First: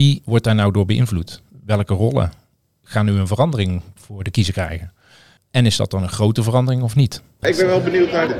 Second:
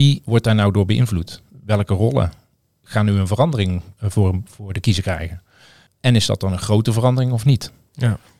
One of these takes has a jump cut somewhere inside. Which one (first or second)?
first